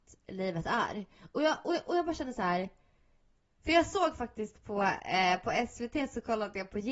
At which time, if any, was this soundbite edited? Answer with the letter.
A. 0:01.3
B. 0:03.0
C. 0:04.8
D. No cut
D